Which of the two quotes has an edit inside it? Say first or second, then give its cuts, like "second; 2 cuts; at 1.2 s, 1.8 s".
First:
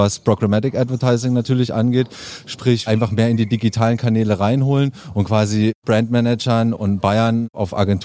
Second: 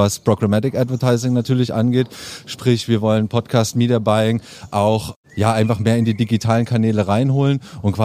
first; 1 cut; at 2.9 s